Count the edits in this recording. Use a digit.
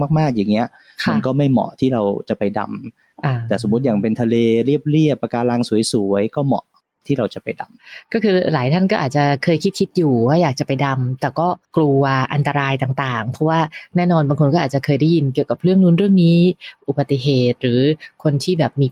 1